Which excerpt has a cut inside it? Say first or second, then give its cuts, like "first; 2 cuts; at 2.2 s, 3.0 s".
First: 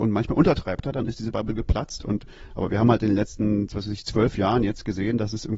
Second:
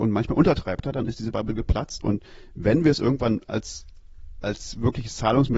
second; 1 cut; at 2.0 s